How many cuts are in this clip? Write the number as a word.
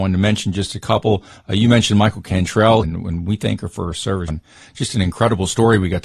two